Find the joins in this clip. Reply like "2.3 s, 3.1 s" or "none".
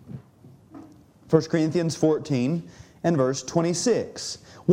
none